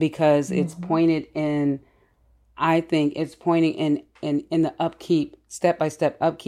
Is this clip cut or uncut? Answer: uncut